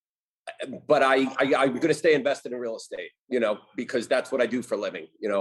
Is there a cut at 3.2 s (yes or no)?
yes